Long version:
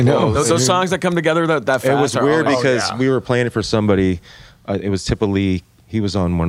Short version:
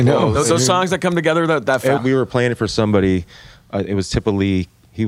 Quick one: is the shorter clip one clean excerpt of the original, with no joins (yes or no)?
no